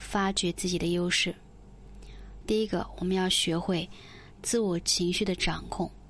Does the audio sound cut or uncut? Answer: cut